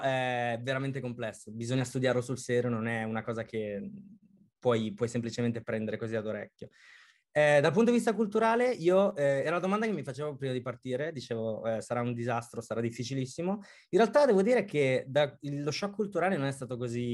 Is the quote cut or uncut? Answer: uncut